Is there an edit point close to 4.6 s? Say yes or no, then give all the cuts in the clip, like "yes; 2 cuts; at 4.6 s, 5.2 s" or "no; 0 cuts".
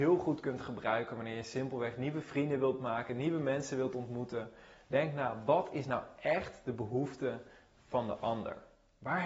no; 1 cut; at 3.1 s